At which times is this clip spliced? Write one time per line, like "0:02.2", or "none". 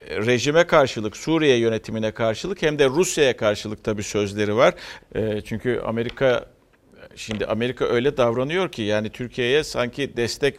0:05.0